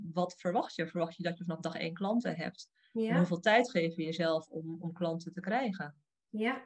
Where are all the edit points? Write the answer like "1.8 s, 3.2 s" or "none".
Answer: none